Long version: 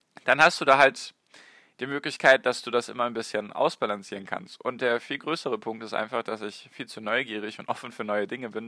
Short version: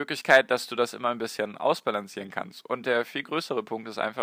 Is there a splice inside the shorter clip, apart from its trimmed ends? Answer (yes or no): no